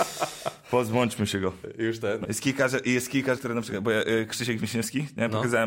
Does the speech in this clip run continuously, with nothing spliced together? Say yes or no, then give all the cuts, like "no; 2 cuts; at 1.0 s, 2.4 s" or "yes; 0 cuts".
no; 2 cuts; at 2.2 s, 3.4 s